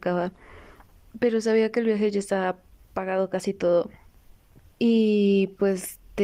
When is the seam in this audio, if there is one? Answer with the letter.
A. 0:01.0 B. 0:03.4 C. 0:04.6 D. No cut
C